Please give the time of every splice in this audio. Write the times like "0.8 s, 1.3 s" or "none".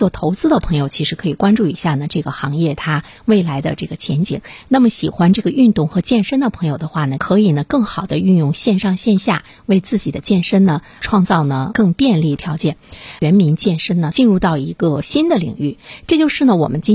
13.2 s